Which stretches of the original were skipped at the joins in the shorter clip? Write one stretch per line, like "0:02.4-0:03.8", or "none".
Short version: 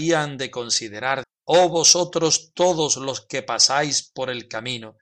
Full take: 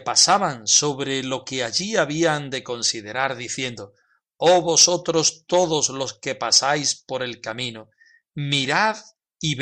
0:03.4-0:04.2